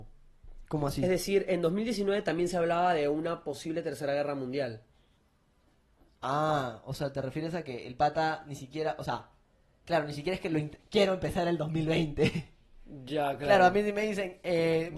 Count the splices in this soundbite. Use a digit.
1